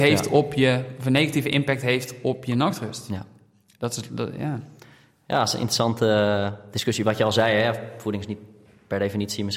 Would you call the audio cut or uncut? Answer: uncut